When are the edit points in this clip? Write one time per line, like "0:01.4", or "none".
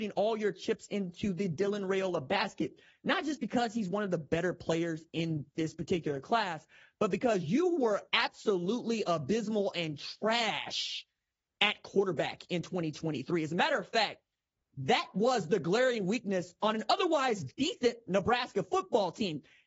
none